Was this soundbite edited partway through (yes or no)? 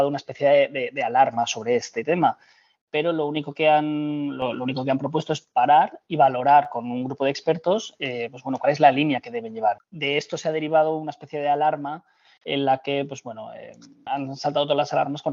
yes